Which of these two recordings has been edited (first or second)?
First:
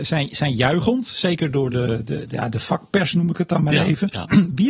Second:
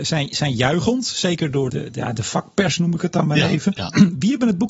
second